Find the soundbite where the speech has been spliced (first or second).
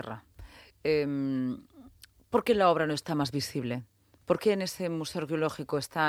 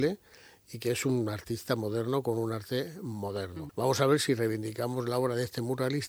second